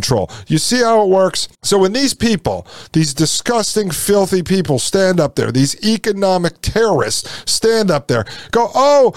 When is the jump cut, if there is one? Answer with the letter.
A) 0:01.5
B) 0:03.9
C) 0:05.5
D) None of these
A